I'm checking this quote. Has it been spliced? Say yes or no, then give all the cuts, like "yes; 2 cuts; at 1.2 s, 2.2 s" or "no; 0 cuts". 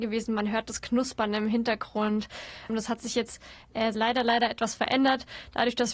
yes; 2 cuts; at 2.7 s, 3.9 s